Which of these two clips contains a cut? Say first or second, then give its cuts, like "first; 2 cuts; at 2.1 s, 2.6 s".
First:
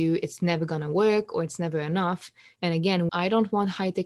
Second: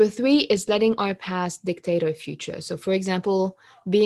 first; 1 cut; at 3.1 s